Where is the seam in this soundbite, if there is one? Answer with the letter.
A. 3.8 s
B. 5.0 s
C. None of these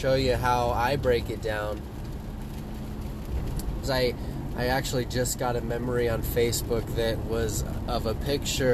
A